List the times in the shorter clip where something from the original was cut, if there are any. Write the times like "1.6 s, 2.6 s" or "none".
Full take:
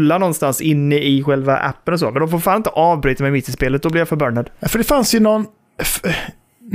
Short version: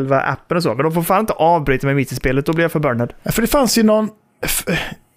none